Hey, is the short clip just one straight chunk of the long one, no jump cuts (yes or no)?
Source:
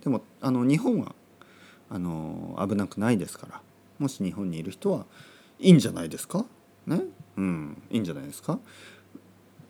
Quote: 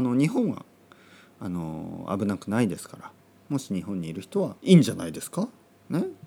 no